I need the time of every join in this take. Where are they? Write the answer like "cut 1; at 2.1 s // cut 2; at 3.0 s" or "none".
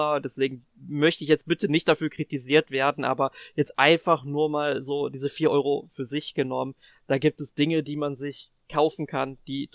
none